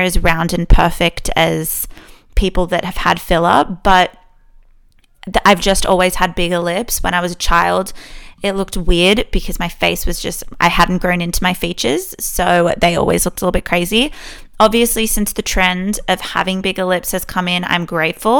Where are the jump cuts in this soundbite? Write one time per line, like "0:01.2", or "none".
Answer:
none

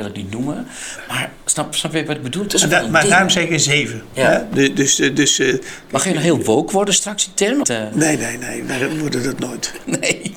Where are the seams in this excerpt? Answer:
0:07.6

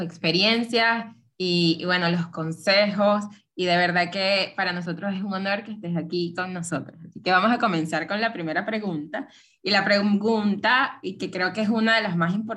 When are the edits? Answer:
none

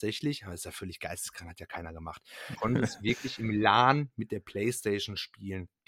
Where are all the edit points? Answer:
0:02.5

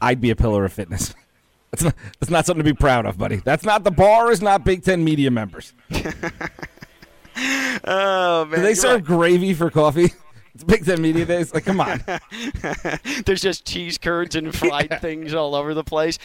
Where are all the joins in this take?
none

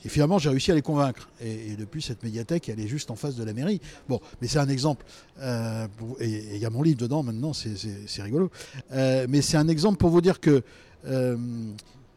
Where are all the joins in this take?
none

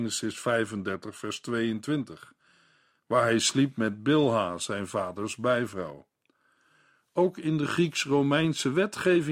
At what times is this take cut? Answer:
none

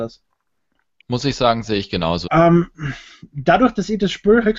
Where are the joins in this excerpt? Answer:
0:01.0
0:02.2

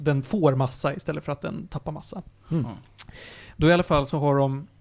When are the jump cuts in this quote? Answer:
none

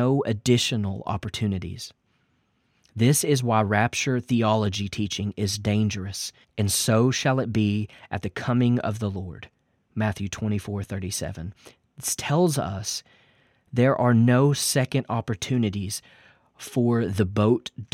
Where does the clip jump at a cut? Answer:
0:06.4

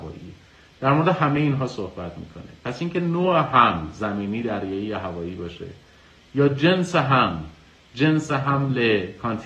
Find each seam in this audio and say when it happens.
none

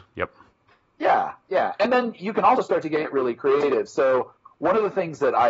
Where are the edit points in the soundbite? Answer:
none

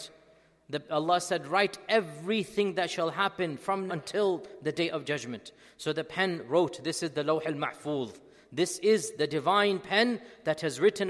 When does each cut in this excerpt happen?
0:03.9

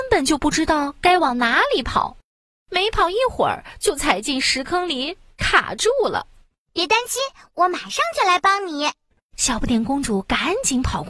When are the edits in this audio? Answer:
none

